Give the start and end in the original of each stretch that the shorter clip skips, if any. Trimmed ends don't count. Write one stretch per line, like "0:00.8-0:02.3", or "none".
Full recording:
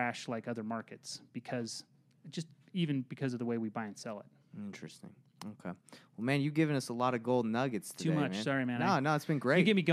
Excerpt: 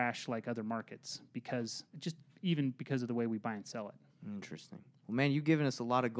0:01.9-0:02.2
0:05.3-0:06.1